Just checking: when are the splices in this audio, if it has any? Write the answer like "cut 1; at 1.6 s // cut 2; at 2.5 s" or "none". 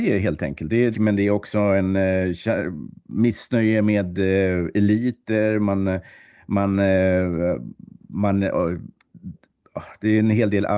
cut 1; at 0.9 s